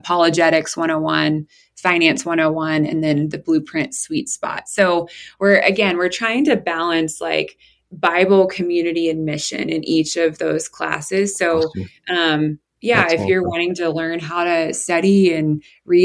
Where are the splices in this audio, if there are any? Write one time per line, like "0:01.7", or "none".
none

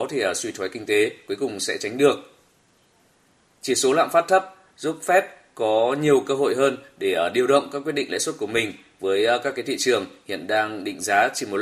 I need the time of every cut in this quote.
none

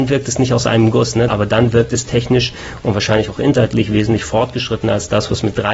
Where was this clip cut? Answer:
0:01.3

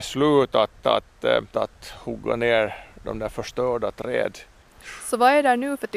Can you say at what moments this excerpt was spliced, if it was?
0:01.5

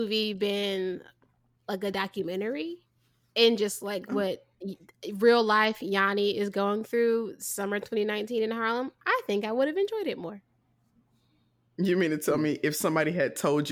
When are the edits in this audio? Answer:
none

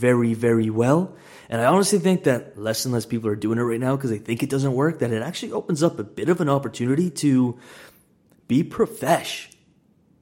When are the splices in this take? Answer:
none

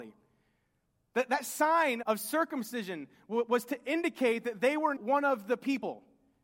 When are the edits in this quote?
0:02.0
0:05.0

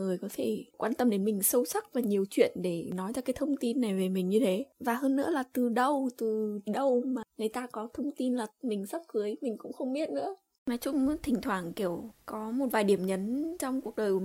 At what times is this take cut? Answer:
none

